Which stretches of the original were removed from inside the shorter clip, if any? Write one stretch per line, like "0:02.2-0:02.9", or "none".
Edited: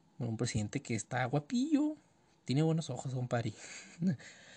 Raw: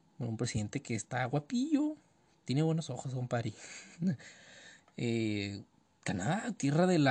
none